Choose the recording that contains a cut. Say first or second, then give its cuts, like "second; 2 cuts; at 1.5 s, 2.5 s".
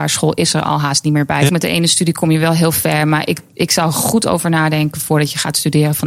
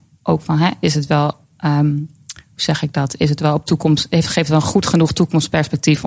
first; 1 cut; at 1.5 s